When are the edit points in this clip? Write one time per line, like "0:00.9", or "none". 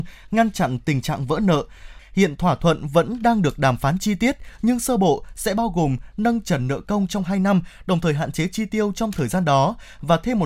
0:02.0